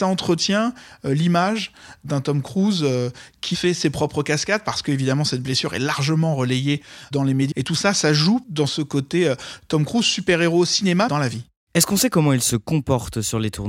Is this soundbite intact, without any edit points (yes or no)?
no